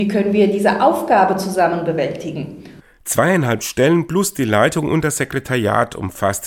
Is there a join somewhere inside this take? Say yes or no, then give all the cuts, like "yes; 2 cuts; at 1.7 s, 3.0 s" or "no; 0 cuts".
no; 0 cuts